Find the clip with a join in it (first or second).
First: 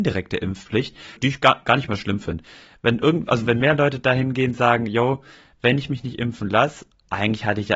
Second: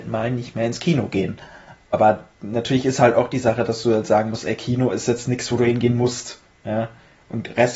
first